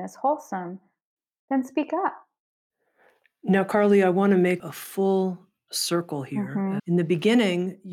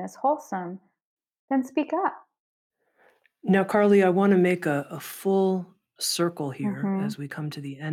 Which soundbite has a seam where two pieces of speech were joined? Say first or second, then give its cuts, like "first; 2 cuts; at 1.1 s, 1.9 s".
first; 2 cuts; at 4.6 s, 6.8 s